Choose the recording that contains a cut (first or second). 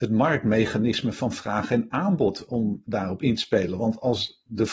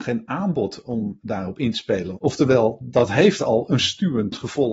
second